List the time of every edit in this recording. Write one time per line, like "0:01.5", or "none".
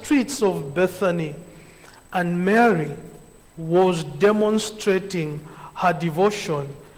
0:03.4